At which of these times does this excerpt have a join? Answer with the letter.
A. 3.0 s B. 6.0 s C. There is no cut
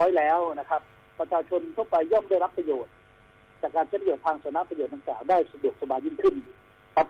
C